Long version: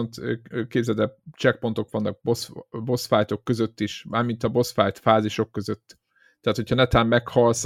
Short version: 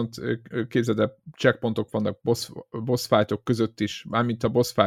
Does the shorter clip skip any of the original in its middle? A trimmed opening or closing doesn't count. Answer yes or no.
no